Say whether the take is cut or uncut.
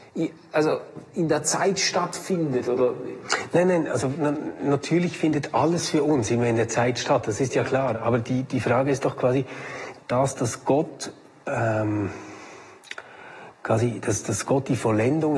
cut